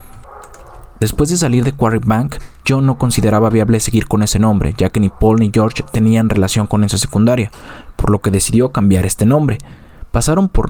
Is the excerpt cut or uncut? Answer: cut